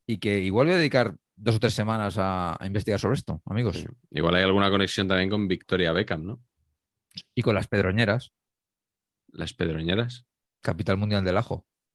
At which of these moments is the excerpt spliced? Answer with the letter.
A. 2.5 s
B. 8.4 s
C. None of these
C